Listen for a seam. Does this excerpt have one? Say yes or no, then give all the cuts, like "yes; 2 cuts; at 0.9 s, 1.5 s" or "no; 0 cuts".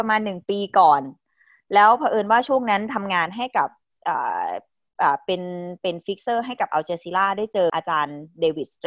yes; 1 cut; at 7.7 s